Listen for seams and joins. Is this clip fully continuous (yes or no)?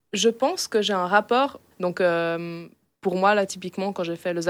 no